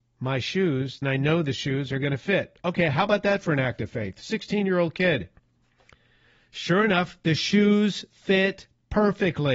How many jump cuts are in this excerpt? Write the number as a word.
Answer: one